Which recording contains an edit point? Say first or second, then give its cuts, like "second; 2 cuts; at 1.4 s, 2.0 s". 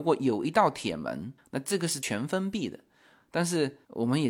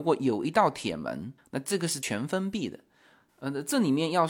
second; 1 cut; at 3.3 s